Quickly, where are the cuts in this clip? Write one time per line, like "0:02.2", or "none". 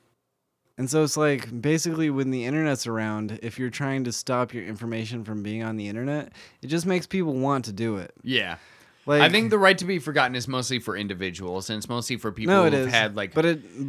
none